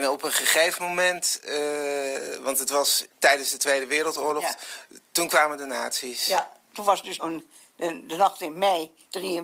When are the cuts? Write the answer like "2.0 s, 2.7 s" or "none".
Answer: 3.1 s, 7.2 s